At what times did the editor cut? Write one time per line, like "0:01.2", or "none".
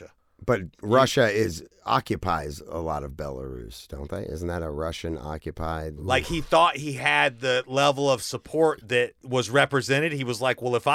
0:06.0

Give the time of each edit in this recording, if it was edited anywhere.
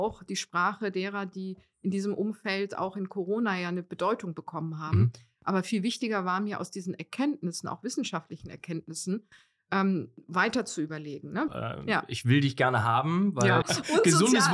0:11.5
0:13.6

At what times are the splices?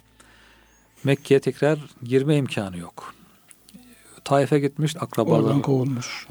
0:04.9

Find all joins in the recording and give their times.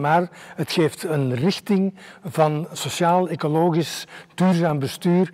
none

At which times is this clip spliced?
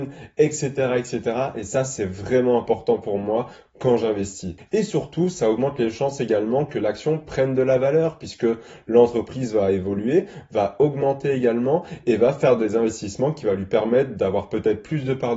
0:04.6

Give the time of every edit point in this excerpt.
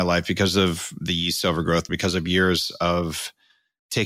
0:01.9

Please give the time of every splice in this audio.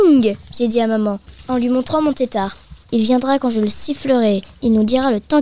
0:02.8

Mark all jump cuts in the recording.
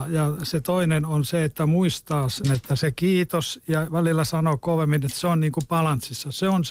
0:02.4

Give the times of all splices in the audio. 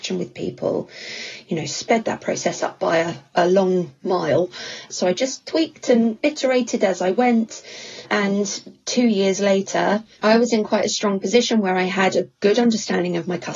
0:04.9
0:10.2

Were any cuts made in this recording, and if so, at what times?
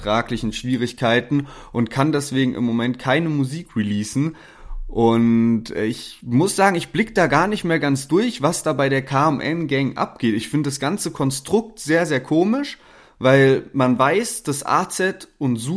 none

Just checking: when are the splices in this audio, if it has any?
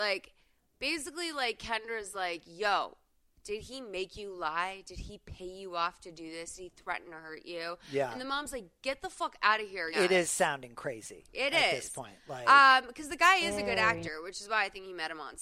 0:09.9

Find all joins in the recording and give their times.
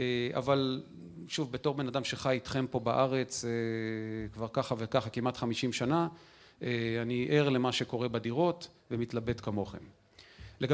none

